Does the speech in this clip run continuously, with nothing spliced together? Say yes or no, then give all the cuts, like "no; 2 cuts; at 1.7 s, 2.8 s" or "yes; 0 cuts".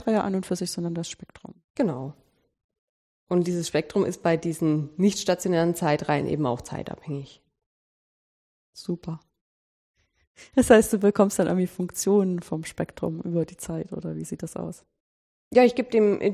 yes; 0 cuts